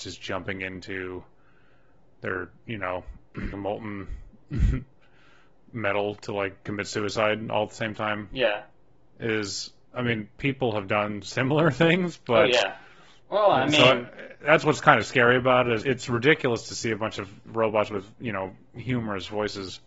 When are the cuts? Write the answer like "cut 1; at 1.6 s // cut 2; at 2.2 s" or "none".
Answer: cut 1; at 3.5 s // cut 2; at 15.8 s